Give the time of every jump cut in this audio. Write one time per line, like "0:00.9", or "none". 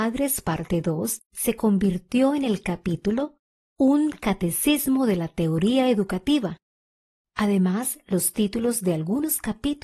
0:01.2
0:07.2